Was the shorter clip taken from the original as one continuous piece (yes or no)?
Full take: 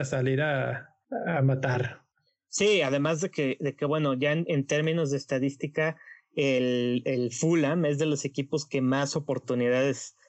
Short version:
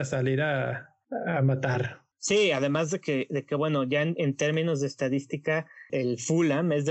no